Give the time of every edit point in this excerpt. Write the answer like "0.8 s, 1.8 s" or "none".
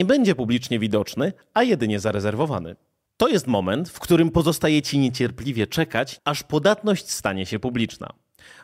6.2 s